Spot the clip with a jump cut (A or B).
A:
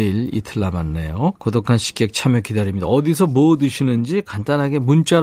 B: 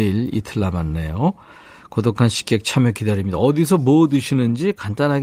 A